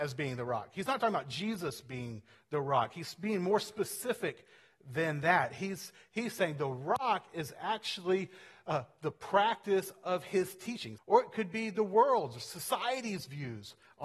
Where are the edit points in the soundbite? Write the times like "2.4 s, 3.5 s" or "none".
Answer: 11.0 s